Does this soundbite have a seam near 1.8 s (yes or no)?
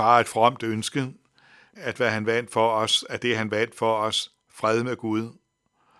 yes